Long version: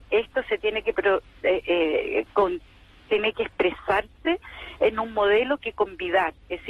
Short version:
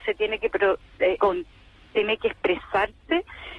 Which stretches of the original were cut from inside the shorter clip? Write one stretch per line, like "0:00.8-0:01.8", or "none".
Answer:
0:01.6-0:02.3